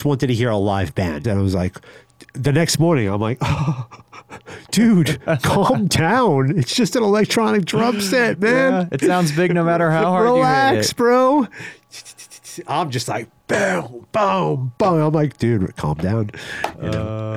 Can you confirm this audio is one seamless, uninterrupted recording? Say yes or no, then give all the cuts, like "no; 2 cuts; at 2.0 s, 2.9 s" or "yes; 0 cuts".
no; 1 cut; at 1.2 s